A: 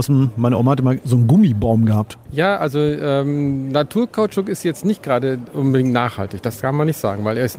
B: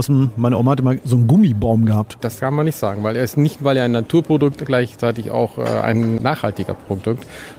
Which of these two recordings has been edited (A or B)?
B